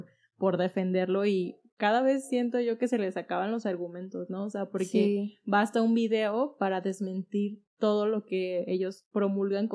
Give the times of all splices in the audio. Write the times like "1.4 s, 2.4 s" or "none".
none